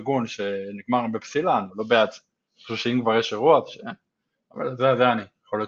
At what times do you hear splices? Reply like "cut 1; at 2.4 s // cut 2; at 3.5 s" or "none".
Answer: cut 1; at 1.7 s // cut 2; at 4.4 s